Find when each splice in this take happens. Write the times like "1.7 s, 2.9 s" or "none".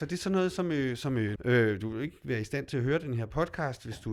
1.4 s